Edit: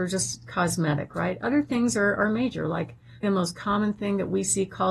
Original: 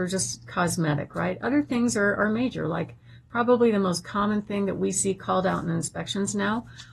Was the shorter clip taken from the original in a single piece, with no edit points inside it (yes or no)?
no